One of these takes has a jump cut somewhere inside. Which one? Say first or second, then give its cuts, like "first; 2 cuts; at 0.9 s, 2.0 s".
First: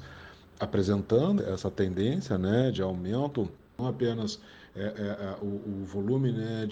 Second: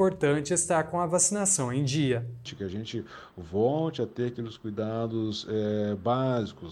first; 1 cut; at 1.4 s